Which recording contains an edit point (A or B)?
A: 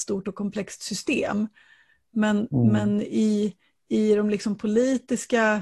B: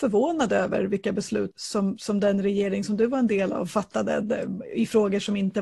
B